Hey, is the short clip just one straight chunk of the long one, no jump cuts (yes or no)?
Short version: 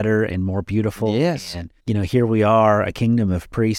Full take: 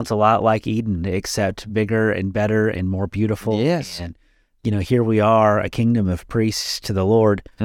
no